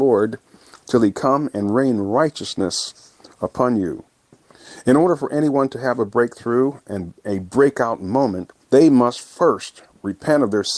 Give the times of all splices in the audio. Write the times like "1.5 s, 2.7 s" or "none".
8.6 s